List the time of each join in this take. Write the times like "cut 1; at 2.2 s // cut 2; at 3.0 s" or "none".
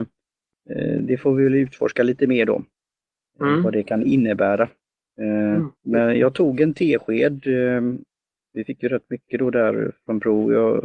cut 1; at 5.8 s